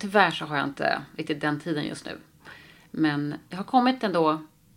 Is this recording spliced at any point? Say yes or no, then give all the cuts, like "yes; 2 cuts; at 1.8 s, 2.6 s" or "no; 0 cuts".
no; 0 cuts